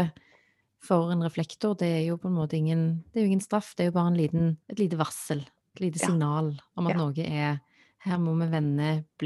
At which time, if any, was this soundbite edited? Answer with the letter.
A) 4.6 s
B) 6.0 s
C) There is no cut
A